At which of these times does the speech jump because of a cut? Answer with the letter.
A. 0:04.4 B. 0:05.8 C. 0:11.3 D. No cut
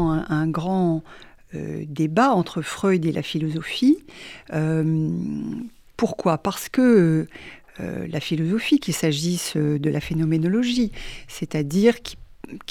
D